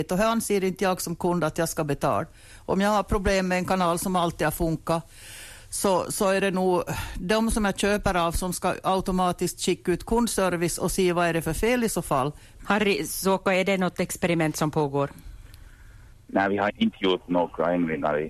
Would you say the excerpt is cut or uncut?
cut